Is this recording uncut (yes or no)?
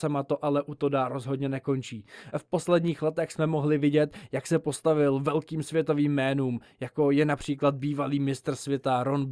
yes